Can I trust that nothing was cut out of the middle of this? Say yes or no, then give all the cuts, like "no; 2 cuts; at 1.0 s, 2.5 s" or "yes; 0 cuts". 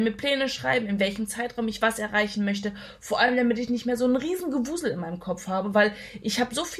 yes; 0 cuts